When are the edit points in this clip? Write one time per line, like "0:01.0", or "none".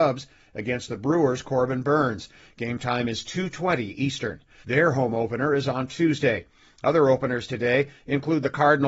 0:04.6